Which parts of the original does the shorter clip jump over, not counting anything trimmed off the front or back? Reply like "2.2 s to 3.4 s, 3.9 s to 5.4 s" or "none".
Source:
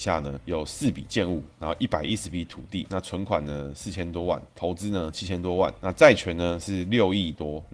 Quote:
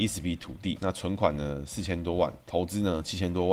none